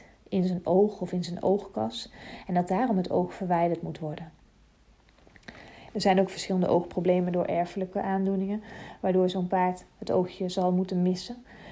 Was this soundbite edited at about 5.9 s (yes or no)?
yes